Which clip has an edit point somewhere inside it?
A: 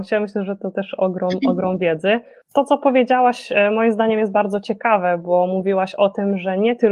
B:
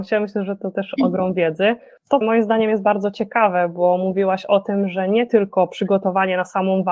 B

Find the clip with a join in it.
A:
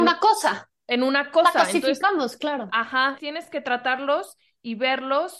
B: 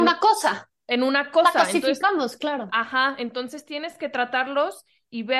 A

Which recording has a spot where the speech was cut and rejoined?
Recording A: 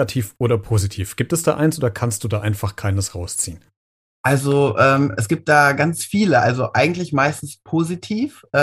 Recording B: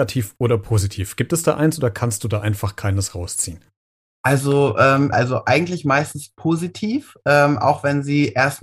B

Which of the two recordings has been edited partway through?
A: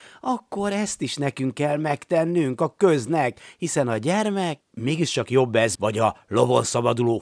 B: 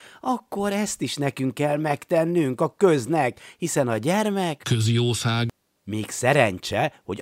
A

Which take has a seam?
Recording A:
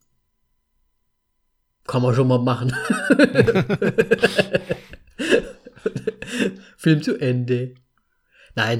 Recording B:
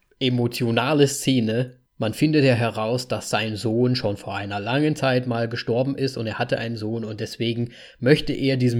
B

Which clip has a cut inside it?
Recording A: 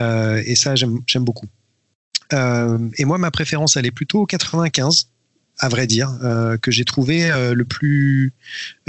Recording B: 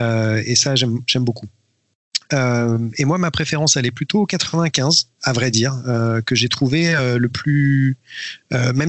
B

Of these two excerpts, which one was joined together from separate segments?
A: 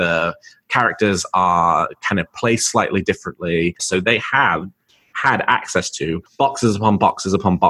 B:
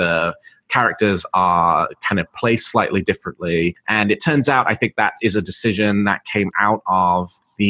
A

